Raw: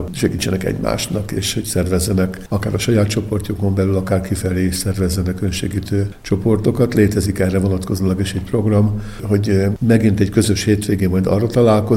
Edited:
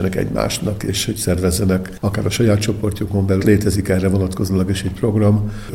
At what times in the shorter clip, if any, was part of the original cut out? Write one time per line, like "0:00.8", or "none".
0:03.4